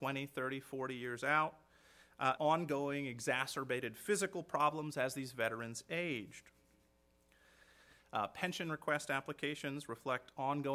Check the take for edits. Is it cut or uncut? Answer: cut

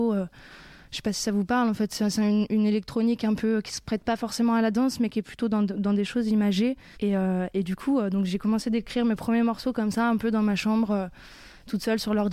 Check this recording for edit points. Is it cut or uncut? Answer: cut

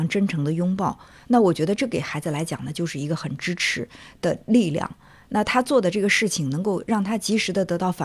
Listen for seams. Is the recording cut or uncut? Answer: uncut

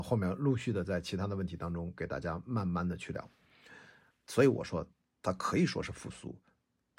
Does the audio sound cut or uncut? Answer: cut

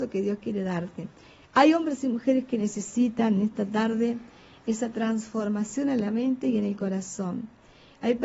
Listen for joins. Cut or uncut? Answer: uncut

